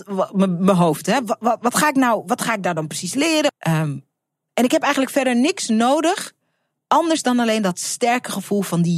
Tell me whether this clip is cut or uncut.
cut